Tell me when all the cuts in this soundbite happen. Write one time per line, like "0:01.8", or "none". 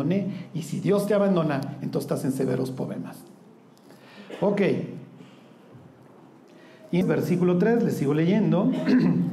0:07.0

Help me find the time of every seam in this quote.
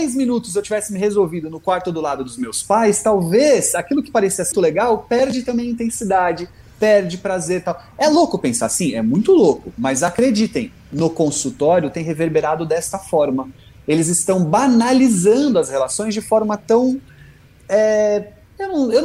0:04.5

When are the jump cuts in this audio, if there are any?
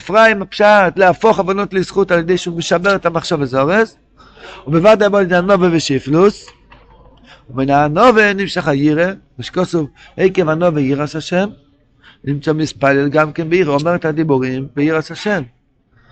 none

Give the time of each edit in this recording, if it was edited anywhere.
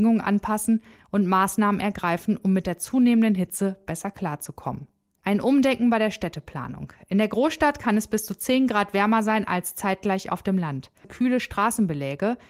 0:05.2
0:11.0

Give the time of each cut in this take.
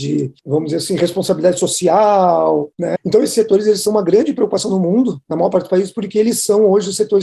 0:03.0

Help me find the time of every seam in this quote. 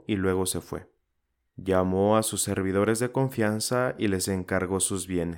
0:01.5

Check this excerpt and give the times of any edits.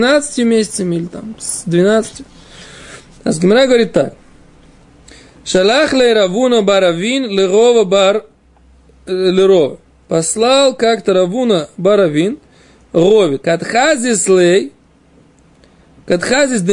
0:13.4

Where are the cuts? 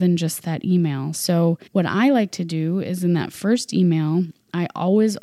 0:01.7

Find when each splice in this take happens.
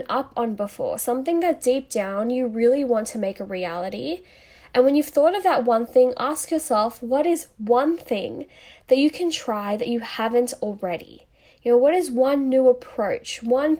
none

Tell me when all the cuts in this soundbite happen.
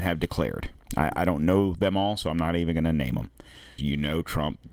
0:03.8

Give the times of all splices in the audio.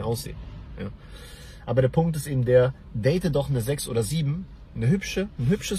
none

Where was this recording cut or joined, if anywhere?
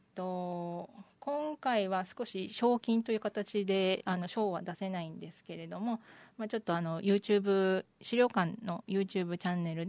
none

